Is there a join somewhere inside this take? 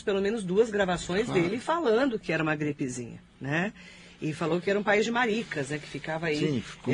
no; 0 cuts

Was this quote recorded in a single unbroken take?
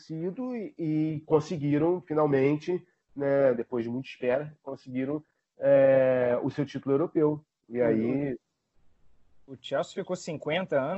yes; 0 cuts

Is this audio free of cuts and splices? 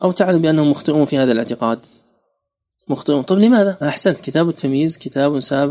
no; 1 cut; at 3.8 s

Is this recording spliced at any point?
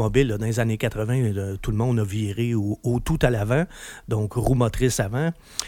yes; 1 cut; at 1.6 s

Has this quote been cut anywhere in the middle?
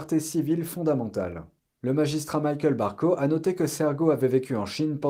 yes; 1 cut; at 1.8 s

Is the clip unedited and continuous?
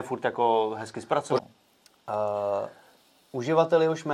no; 1 cut; at 1.4 s

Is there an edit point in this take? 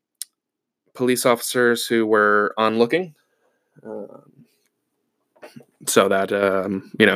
no; 0 cuts

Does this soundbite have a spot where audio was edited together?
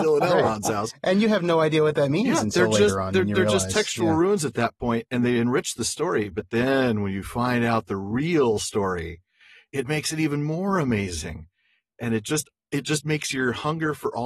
no; 0 cuts

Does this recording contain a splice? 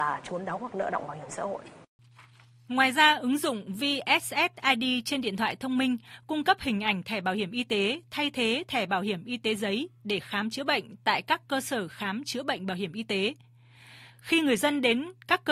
no; 0 cuts

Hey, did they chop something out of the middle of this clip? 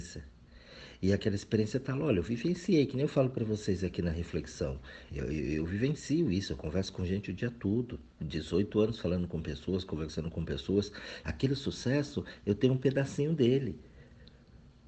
yes; 3 cuts; at 5.1 s, 8.1 s, 11.2 s

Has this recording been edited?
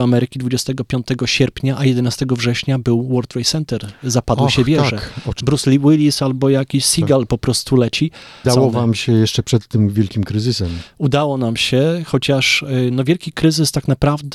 yes; 2 cuts; at 5.4 s, 8.4 s

